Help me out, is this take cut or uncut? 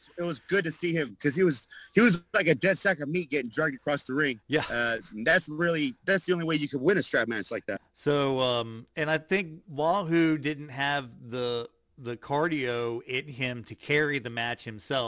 cut